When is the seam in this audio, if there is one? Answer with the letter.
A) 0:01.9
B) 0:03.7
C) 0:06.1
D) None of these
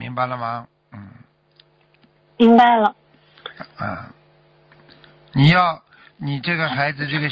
C